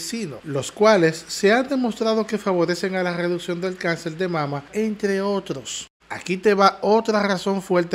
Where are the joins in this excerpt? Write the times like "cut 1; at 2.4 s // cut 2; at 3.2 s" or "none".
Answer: cut 1; at 4.7 s // cut 2; at 6.0 s